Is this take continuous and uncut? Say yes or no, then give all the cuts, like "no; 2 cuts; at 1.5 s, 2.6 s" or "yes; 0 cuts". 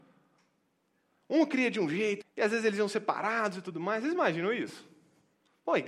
no; 2 cuts; at 1.2 s, 2.2 s